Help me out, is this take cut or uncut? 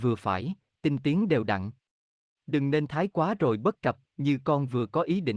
cut